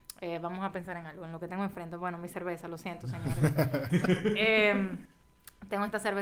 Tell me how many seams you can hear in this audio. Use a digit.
1